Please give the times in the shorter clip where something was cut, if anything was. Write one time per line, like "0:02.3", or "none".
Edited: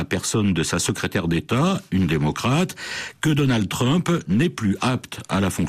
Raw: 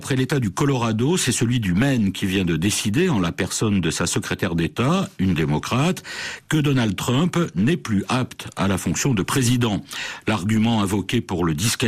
none

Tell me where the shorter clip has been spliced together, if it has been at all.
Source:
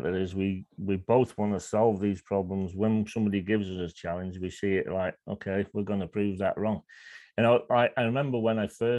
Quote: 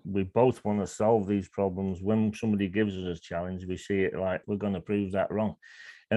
0:04.4

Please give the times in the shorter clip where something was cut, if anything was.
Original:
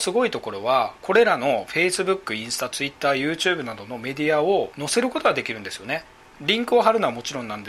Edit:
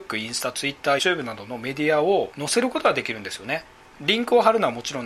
0:01.0

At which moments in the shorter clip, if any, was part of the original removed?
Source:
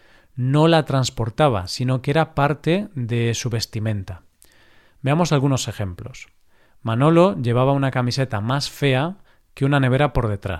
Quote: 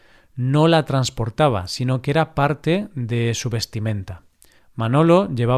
0:04.6

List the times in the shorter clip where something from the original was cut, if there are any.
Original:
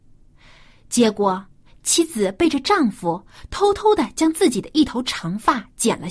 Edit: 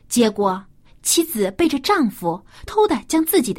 0:02.7

